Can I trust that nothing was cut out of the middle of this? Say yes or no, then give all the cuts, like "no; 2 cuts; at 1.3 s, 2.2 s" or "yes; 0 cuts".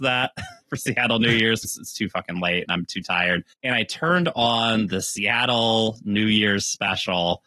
no; 2 cuts; at 1.6 s, 3.5 s